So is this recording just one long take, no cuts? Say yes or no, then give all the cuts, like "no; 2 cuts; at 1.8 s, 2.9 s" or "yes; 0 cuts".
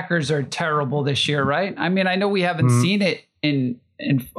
yes; 0 cuts